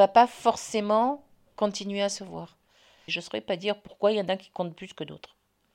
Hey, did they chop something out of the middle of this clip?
yes; 1 cut; at 3.1 s

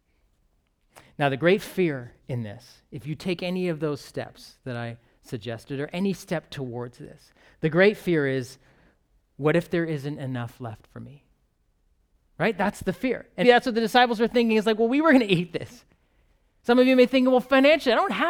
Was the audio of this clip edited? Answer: yes; 1 cut; at 13.4 s

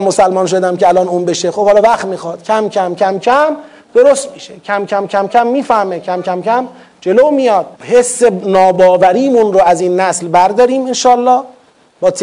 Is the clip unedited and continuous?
no; 2 cuts; at 6.2 s, 7.7 s

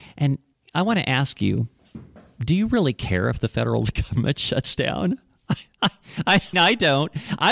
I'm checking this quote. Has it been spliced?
yes; 1 cut; at 6.5 s

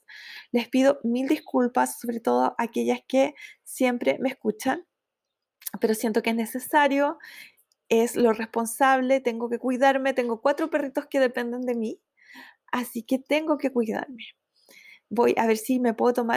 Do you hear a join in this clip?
no; 0 cuts

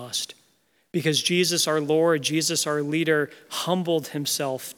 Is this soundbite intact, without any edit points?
yes; 0 cuts

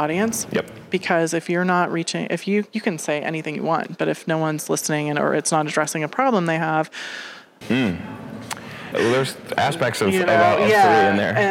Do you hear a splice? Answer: yes; 2 cuts; at 7.6 s, 8.9 s

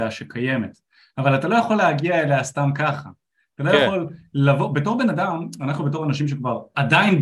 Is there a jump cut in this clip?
no; 0 cuts

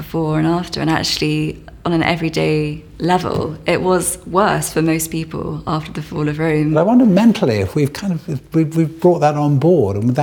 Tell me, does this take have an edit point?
no; 0 cuts

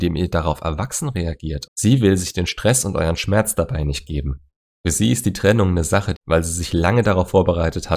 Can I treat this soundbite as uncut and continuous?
no; 2 cuts; at 1.7 s, 6.1 s

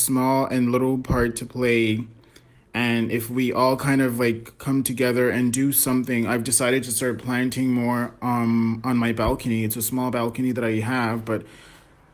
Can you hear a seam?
no; 0 cuts

